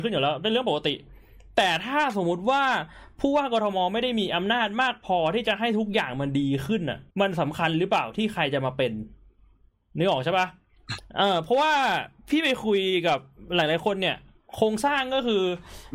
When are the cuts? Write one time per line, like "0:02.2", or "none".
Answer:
0:07.1